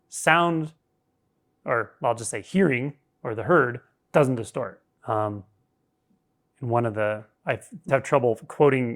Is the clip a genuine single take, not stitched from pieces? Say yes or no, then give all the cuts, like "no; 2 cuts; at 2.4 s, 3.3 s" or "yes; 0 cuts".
no; 2 cuts; at 5.0 s, 7.9 s